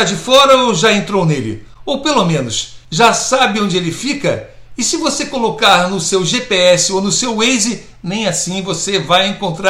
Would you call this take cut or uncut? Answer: uncut